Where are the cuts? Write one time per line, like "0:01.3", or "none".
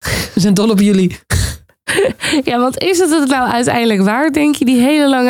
none

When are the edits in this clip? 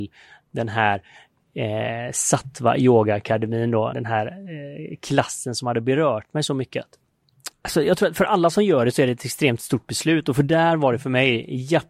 0:03.9
0:07.5

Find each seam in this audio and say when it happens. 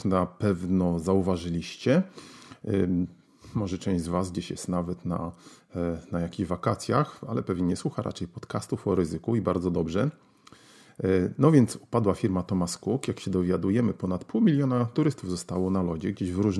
none

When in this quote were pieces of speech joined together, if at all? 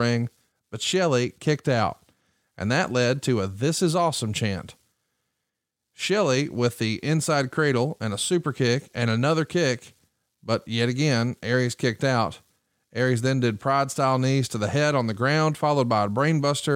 none

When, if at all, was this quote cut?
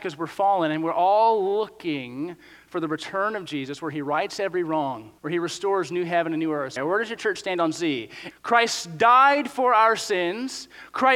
0:05.2
0:06.8
0:08.3

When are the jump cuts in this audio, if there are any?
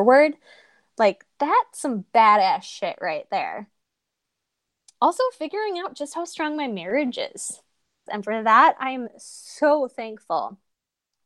0:08.1

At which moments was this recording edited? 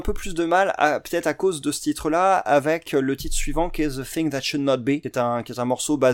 none

